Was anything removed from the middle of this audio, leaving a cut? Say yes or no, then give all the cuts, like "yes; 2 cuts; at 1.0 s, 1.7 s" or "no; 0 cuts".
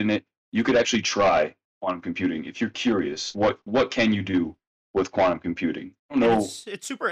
yes; 2 cuts; at 3.3 s, 6.0 s